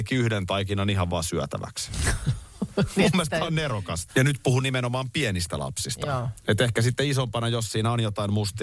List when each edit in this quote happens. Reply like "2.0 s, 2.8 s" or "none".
4.1 s

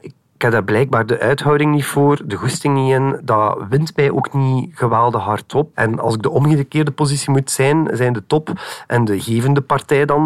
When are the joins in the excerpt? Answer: 5.7 s

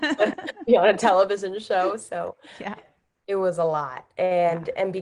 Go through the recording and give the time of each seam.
2.8 s

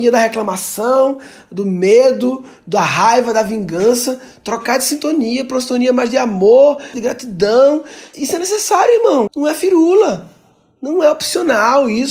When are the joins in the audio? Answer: 6.9 s, 8.1 s, 9.3 s

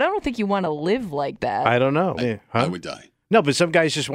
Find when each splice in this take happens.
2.2 s

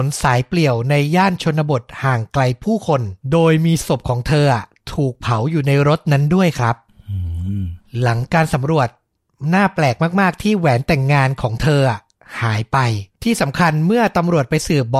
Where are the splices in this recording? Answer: 3.2 s, 13.1 s

